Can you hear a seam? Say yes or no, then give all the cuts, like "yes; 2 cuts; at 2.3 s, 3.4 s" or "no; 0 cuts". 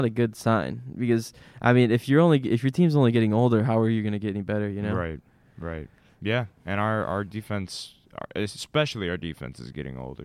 no; 0 cuts